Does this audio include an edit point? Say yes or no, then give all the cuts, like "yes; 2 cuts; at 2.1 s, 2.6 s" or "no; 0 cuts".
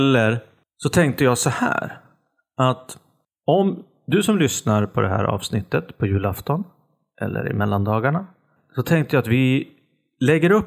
no; 0 cuts